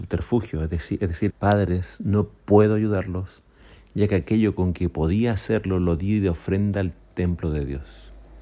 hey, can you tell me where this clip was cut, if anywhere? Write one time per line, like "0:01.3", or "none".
0:01.3